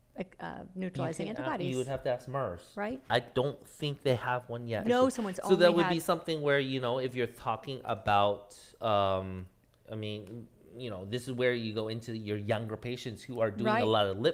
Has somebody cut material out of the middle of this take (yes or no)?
yes